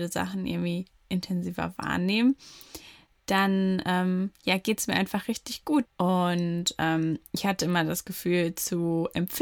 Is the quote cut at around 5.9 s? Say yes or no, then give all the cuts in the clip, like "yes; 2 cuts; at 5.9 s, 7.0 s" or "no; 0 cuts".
yes; 1 cut; at 5.9 s